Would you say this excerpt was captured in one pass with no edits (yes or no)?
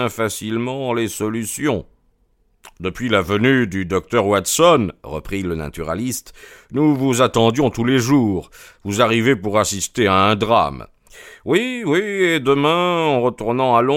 yes